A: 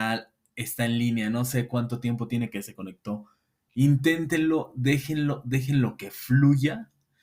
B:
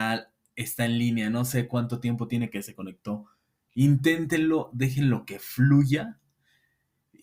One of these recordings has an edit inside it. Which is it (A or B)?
B